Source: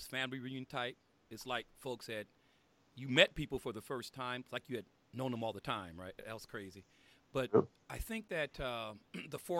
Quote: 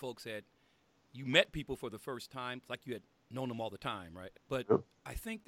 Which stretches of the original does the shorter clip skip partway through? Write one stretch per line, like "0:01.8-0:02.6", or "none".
0:06.2-0:07.2